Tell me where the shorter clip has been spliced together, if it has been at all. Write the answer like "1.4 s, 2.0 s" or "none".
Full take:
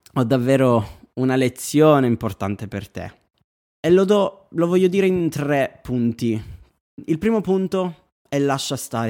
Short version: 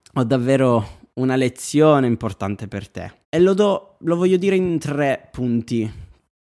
3.2 s